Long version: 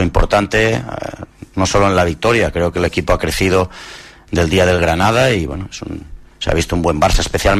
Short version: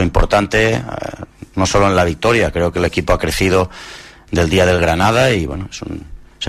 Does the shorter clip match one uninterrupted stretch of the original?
yes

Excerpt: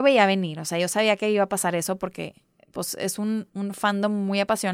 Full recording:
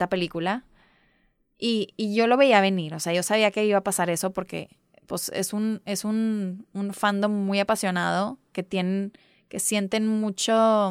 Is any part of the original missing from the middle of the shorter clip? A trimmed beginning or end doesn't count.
yes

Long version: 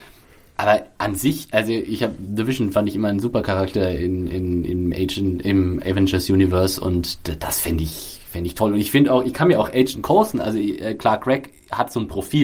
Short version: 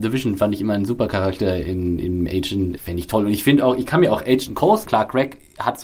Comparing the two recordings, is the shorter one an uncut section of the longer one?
no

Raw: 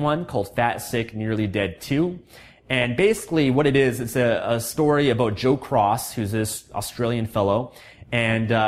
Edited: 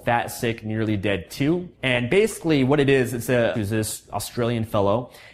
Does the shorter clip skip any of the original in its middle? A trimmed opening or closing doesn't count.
yes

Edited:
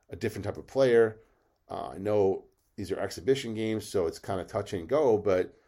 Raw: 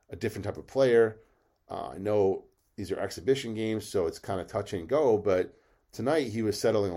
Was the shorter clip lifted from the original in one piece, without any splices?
yes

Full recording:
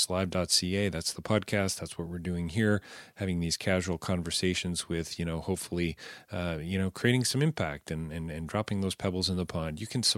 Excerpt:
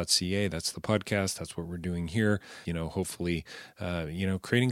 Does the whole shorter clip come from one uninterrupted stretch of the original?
no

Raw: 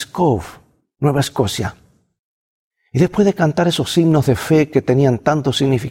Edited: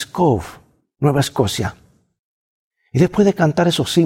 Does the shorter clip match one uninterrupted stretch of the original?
yes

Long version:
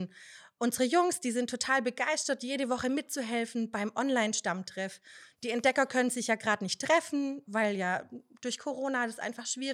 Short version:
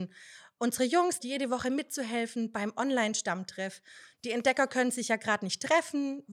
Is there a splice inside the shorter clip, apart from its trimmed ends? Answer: yes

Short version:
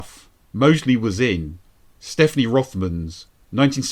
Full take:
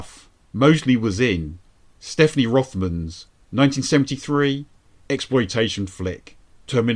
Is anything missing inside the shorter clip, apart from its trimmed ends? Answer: no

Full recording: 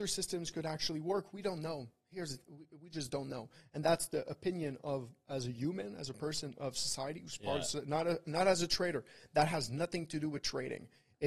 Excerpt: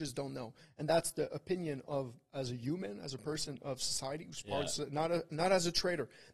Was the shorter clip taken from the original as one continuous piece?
yes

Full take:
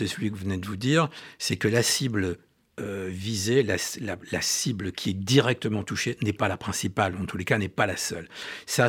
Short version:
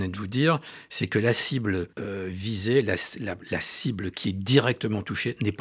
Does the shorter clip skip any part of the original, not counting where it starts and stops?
yes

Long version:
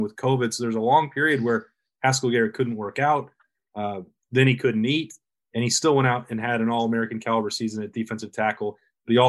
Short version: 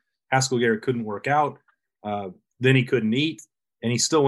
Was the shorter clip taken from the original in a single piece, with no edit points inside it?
yes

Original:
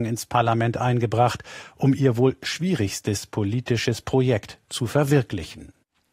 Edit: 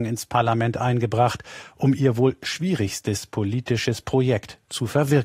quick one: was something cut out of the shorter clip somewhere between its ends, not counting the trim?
no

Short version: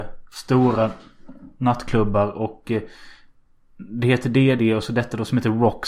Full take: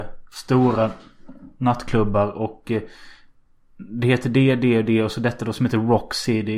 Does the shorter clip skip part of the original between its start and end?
yes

